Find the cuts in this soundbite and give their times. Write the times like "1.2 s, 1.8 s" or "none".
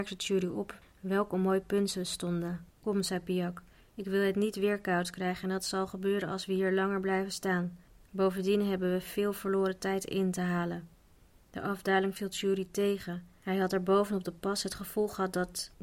2.8 s